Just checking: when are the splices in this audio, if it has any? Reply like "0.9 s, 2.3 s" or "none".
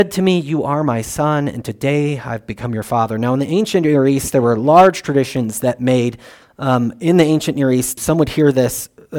6.4 s, 8.0 s